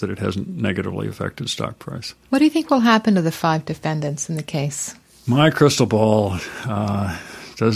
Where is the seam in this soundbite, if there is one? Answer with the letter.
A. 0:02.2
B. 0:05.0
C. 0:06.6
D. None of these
D